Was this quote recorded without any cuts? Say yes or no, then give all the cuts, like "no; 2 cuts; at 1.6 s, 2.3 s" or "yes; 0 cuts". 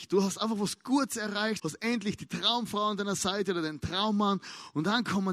no; 1 cut; at 1.6 s